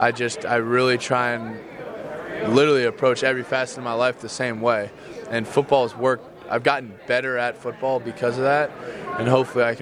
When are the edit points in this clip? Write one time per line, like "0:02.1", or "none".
none